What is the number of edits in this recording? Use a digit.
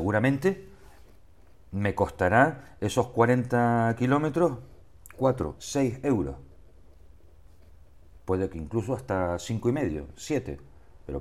1